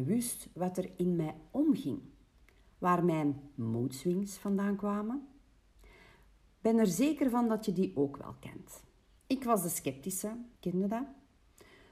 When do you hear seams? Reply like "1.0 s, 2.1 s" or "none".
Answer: 9.2 s, 10.6 s